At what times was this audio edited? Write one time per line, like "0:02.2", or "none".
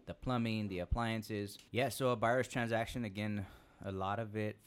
0:01.7